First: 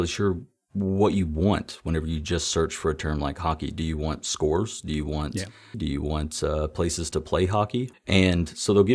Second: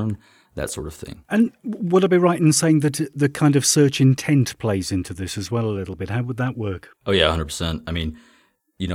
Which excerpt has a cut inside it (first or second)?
first